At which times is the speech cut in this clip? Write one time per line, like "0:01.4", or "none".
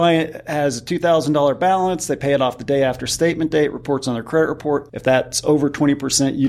0:04.9